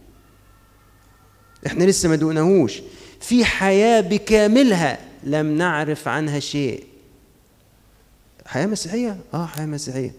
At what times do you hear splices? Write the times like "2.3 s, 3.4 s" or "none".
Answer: none